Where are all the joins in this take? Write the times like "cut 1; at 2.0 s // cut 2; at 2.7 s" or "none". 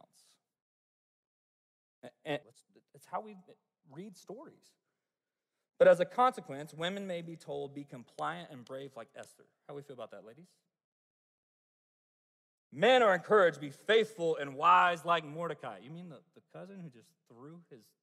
cut 1; at 2.4 s